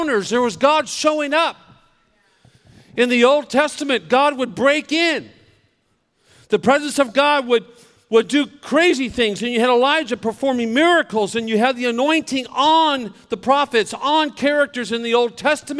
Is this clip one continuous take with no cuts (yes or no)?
yes